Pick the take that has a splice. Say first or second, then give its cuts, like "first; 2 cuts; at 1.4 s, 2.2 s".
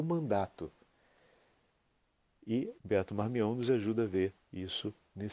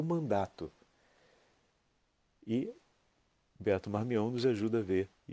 first; 1 cut; at 2.8 s